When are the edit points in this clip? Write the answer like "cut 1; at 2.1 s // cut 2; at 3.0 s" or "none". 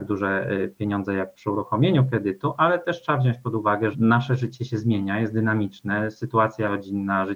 cut 1; at 3.9 s